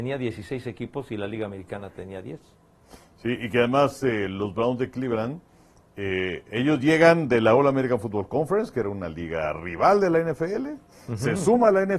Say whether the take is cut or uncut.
uncut